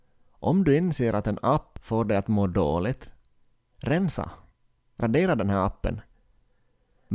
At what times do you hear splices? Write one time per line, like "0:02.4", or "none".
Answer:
none